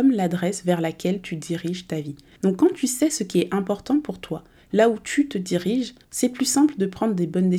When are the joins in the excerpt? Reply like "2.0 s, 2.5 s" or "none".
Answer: 2.4 s, 6.0 s